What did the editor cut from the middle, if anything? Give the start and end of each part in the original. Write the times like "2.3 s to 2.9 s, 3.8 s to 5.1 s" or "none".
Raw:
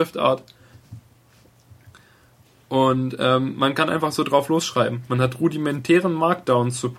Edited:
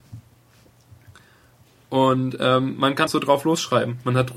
3.9 s to 4.1 s